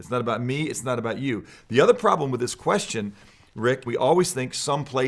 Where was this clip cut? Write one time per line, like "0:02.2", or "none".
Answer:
0:03.9